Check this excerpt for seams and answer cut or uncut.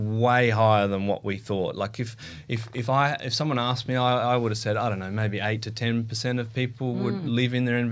uncut